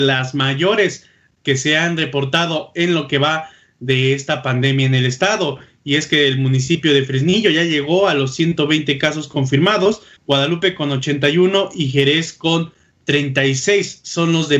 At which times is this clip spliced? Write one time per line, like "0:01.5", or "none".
0:10.2